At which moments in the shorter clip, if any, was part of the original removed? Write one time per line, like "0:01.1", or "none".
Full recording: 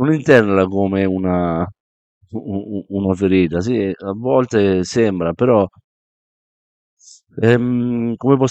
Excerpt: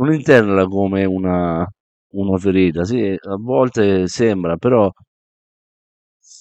0:02.1